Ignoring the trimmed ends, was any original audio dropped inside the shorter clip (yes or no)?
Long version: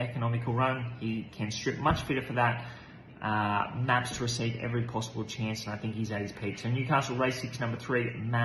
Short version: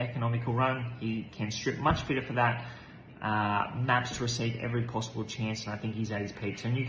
no